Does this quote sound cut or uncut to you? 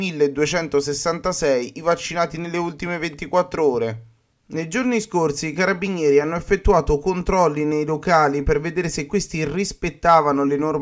uncut